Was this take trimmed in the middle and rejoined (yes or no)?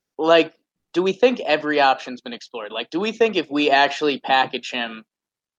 no